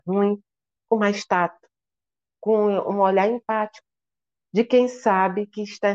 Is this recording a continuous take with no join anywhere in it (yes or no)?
no